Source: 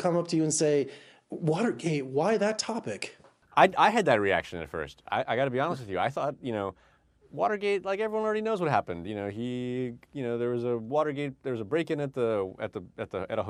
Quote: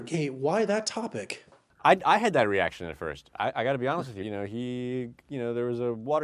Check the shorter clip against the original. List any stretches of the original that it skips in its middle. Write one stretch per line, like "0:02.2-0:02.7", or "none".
0:05.9-0:09.0